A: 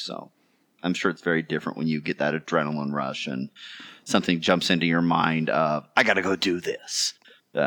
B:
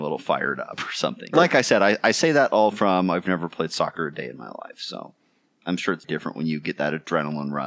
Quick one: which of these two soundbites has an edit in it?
B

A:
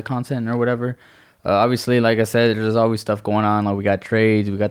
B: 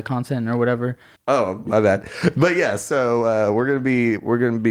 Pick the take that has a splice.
B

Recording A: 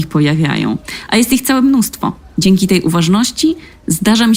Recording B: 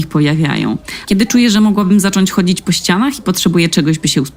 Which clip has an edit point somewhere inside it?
B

